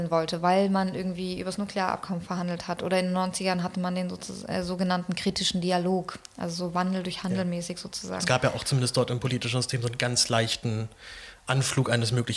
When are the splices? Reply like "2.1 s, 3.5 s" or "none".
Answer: none